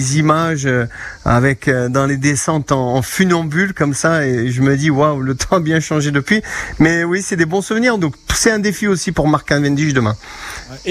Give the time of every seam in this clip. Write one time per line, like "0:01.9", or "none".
0:08.0